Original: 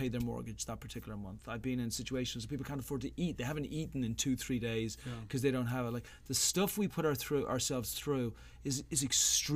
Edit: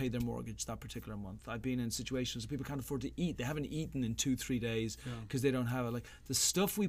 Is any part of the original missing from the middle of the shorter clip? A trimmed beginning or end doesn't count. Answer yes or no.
no